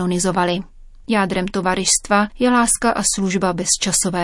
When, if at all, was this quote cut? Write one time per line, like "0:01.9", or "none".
0:01.0
0:02.3